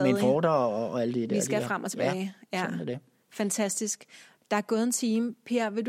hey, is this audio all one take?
yes; 0 cuts

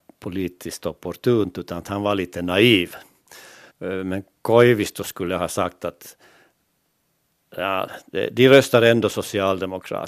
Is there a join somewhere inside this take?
yes; 1 cut; at 3.7 s

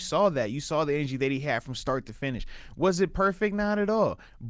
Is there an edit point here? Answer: no; 0 cuts

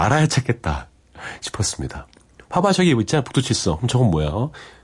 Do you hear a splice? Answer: no; 0 cuts

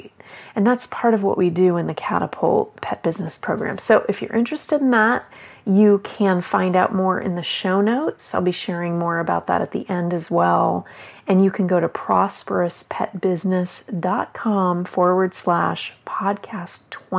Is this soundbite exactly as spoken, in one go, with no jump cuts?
yes; 0 cuts

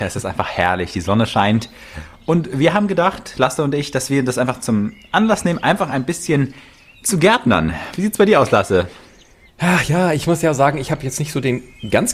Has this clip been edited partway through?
no; 0 cuts

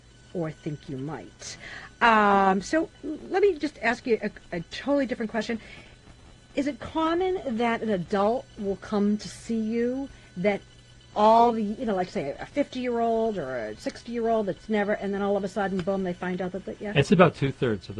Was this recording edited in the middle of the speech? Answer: no; 0 cuts

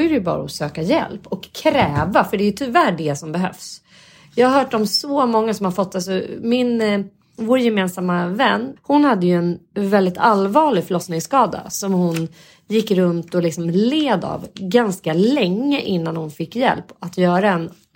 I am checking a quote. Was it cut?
yes; 1 cut; at 8.8 s

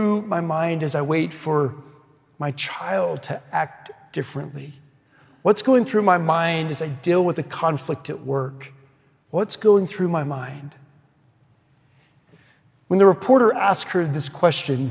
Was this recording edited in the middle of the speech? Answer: no; 0 cuts

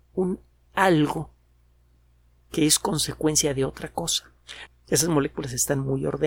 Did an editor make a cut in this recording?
yes; 1 cut; at 4.7 s

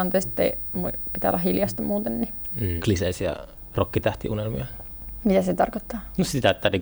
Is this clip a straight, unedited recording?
no; 1 cut; at 2.8 s

